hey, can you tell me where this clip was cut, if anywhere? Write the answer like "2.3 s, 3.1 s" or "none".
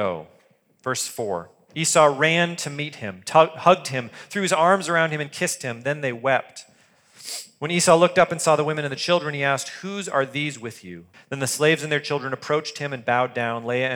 11.1 s